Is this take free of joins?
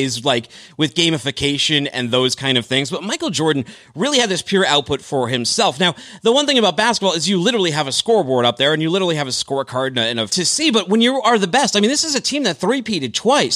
no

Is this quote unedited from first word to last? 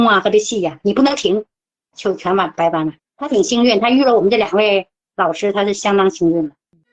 no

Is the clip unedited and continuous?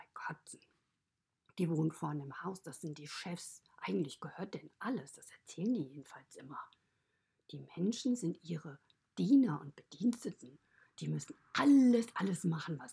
yes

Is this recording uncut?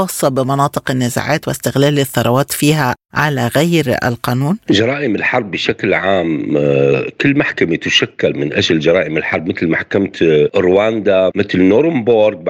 no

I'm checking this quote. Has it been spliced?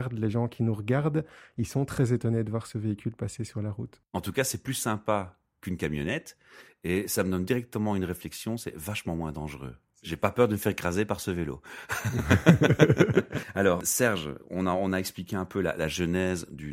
no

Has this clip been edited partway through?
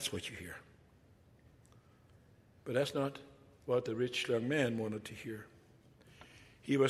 no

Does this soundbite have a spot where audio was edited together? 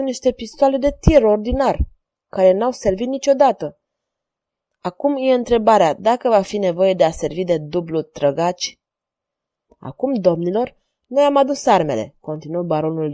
yes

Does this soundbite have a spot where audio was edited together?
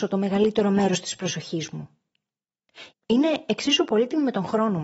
yes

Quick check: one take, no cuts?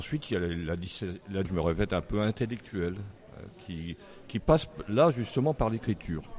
no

